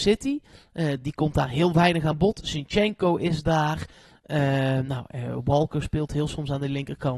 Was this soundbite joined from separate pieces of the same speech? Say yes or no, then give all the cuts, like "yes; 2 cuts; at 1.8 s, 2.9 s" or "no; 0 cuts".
no; 0 cuts